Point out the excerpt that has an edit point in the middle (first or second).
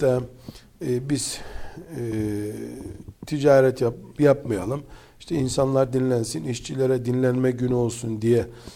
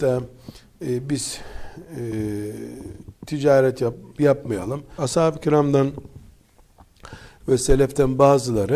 second